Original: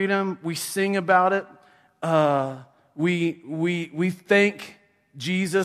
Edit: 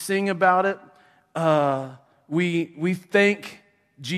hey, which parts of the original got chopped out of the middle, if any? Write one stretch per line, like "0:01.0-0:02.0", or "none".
0:03.4-0:03.9